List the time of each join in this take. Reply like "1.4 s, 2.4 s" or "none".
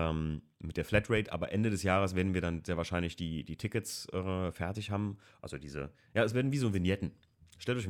none